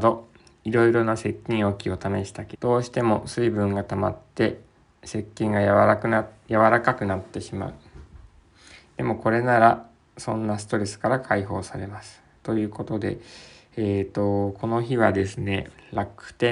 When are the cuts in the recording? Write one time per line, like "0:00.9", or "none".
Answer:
0:02.5
0:04.3